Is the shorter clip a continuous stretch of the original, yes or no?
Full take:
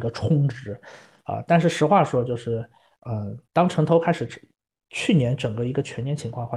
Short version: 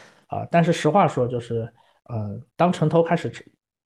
yes